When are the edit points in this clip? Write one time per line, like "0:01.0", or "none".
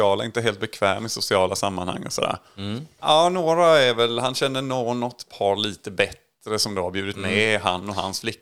0:03.0